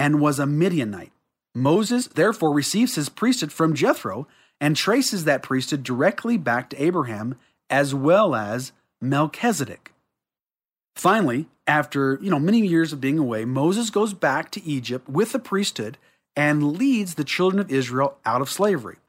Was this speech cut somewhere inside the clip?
no; 0 cuts

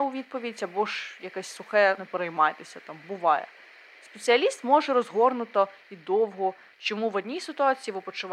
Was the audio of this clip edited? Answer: yes; 2 cuts; at 2.0 s, 6.7 s

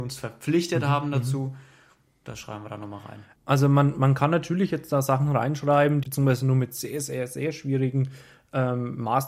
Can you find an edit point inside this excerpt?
yes; 2 cuts; at 3.4 s, 6.0 s

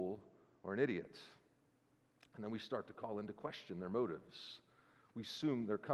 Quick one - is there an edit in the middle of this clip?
no; 0 cuts

